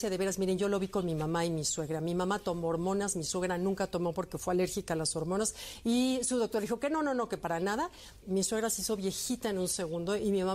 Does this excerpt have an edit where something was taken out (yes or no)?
yes